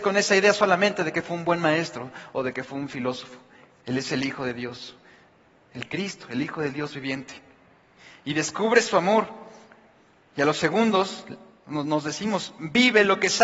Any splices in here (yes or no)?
no